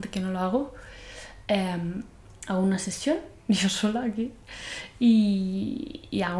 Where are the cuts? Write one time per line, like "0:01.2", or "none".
none